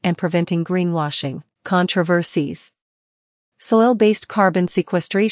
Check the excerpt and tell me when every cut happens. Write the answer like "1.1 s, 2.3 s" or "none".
1.5 s